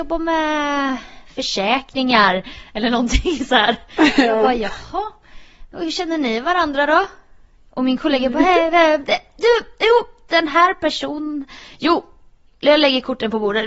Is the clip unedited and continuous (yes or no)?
yes